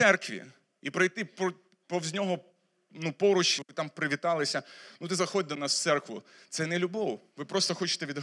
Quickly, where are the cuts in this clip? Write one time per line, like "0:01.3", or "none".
0:03.6